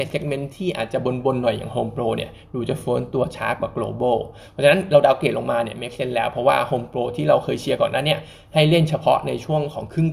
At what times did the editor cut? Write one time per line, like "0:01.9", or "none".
none

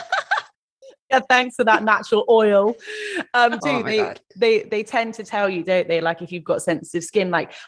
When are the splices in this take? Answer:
0:03.6

